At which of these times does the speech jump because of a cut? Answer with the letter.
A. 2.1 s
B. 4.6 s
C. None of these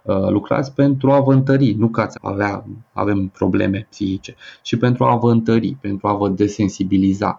A